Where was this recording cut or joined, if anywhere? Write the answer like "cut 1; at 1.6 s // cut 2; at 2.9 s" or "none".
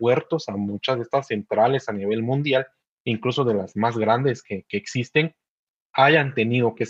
none